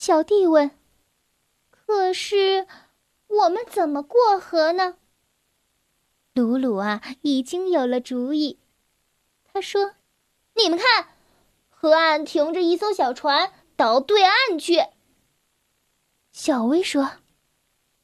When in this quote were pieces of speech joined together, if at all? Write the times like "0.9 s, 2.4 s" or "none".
10.0 s, 13.6 s